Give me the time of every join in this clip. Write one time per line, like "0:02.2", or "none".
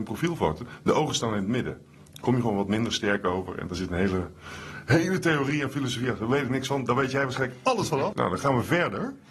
0:08.1